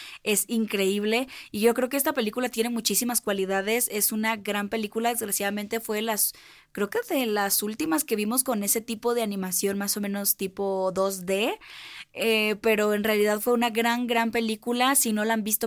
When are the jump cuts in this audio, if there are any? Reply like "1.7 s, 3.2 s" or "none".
none